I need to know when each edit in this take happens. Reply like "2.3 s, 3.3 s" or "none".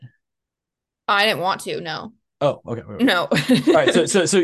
3.0 s